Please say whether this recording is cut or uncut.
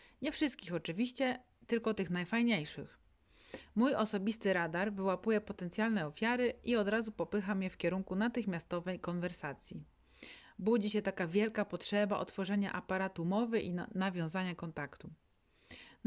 uncut